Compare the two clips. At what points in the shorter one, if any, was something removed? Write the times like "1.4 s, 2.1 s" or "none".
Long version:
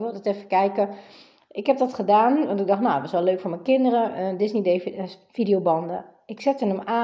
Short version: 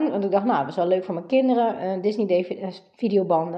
none

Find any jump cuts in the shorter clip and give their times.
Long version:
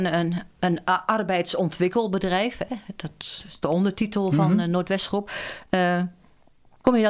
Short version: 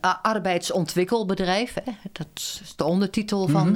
none

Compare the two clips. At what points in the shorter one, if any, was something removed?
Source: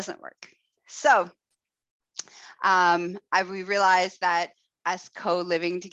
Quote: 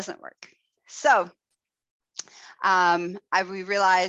none

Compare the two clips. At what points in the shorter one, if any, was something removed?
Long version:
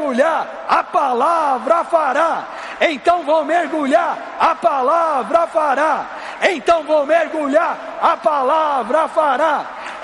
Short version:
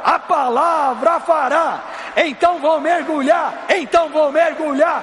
3.7 s

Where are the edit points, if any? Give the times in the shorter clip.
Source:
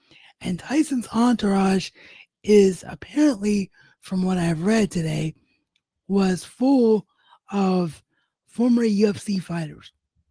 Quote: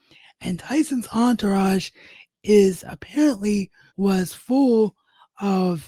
3.9 s

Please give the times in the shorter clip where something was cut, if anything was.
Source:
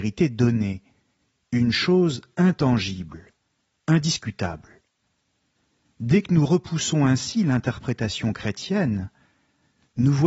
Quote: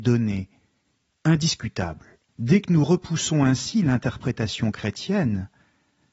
1.1 s, 2.3 s

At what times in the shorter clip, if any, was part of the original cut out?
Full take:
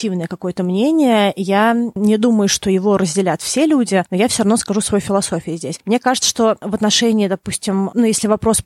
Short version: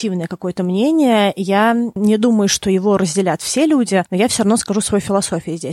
none

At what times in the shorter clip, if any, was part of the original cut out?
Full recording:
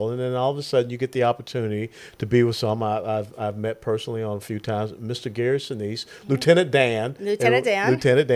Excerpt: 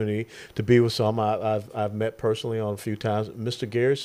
none

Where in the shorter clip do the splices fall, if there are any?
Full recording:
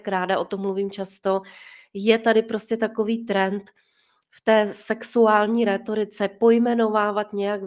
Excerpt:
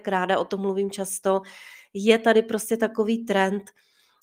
none

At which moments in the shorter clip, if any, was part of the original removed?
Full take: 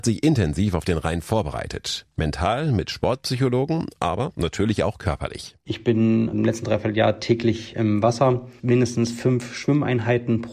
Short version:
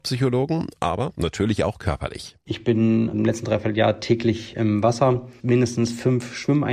none

